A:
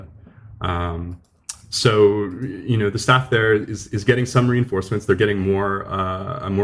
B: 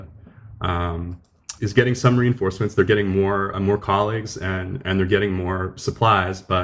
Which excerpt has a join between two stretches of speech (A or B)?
B